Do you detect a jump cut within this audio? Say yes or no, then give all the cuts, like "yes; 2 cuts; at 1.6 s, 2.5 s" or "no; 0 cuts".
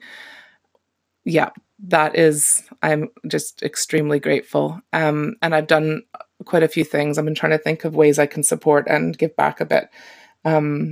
no; 0 cuts